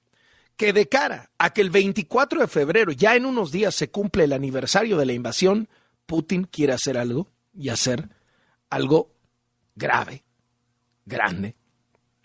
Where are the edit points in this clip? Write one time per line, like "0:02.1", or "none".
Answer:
none